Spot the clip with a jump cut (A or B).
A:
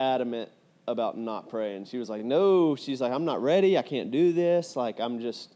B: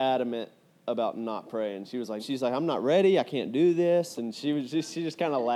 B